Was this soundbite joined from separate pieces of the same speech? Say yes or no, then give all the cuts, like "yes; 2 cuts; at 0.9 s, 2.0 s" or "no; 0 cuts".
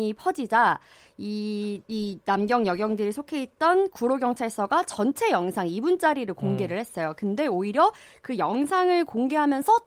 yes; 1 cut; at 1.8 s